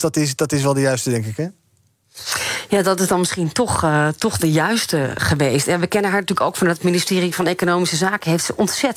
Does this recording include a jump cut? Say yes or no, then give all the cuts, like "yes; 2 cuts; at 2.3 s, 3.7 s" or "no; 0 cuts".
yes; 1 cut; at 5.2 s